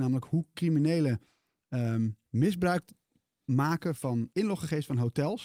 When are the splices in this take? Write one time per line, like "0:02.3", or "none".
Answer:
0:02.2
0:04.3